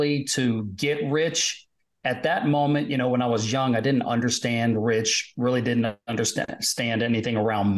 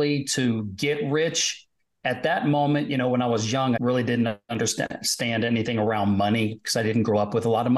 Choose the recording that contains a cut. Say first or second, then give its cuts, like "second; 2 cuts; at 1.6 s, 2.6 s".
second; 1 cut; at 3.8 s